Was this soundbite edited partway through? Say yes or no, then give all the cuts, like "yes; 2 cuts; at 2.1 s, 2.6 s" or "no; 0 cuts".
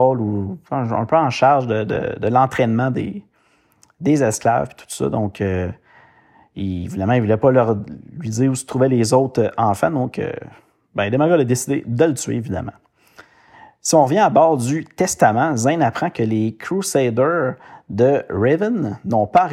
no; 0 cuts